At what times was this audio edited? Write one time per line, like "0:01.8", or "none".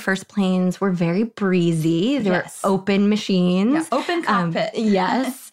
none